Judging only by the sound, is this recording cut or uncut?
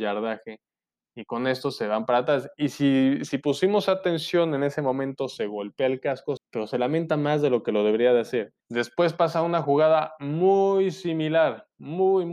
cut